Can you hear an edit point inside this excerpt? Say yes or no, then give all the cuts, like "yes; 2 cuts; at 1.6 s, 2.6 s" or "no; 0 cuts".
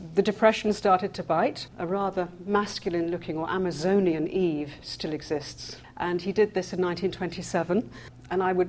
yes; 2 cuts; at 1.7 s, 5.8 s